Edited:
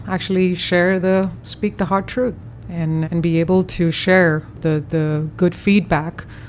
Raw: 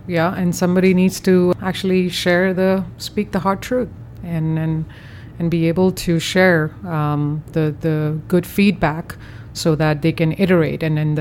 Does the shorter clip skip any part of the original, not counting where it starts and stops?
yes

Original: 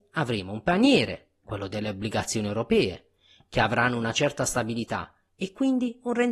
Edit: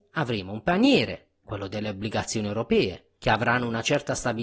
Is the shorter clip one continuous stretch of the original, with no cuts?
no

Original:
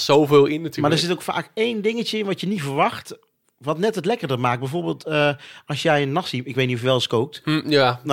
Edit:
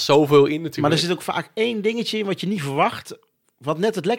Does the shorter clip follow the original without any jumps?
yes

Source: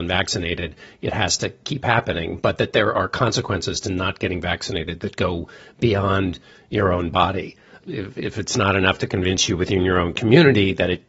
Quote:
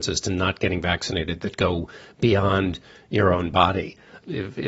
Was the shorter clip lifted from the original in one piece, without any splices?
yes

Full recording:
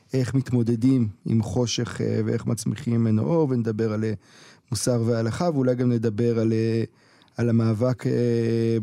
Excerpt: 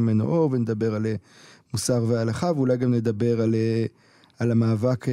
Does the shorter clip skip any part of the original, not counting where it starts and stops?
no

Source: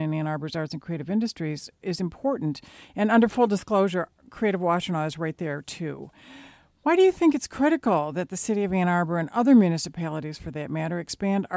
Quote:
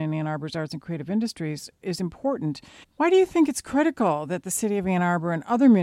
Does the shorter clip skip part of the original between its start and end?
yes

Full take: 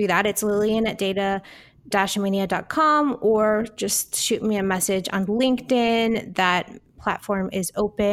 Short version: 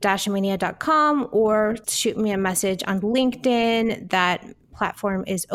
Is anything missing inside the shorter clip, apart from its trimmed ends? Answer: yes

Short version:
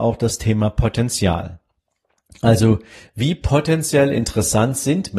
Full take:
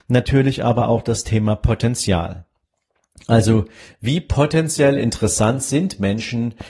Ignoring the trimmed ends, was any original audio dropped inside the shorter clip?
no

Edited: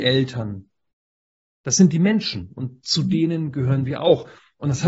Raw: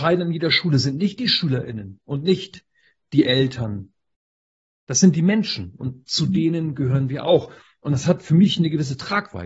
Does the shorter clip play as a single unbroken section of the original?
yes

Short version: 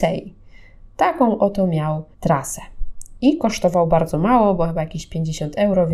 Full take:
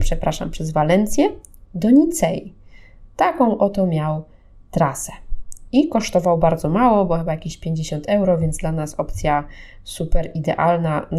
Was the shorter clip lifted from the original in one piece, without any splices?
no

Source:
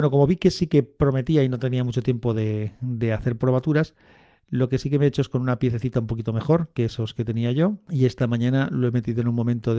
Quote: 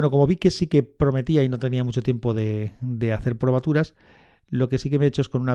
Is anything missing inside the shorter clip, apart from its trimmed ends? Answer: no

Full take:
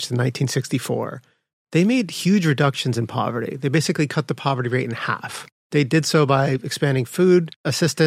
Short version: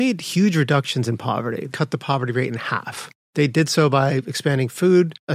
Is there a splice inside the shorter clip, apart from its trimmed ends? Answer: yes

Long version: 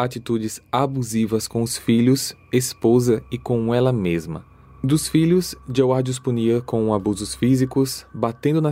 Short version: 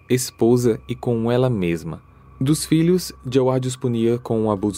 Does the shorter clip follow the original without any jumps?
yes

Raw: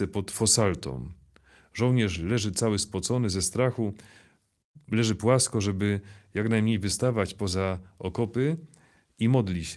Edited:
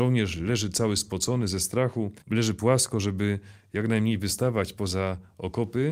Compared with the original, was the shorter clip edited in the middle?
yes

